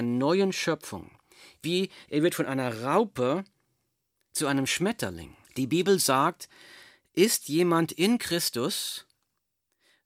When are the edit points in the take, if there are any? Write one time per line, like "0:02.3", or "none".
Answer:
0:05.4

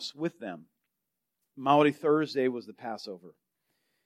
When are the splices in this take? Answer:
0:01.5

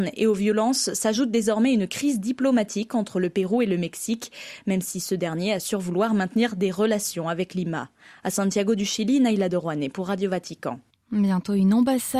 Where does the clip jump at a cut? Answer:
none

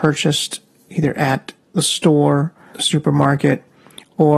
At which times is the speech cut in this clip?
0:02.7

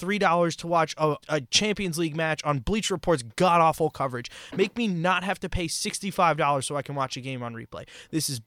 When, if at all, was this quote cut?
0:01.2

